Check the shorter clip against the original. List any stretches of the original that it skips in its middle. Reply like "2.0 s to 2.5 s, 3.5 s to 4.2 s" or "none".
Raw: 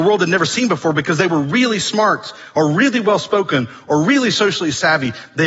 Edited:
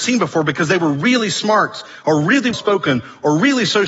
3.0 s to 3.2 s